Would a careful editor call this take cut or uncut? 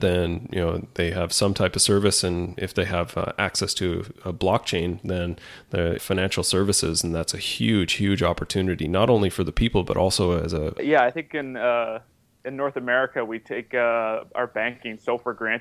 cut